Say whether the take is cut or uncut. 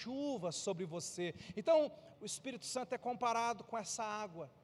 cut